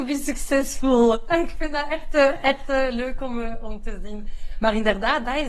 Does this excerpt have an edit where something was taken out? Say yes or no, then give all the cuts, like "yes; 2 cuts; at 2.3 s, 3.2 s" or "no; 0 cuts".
no; 0 cuts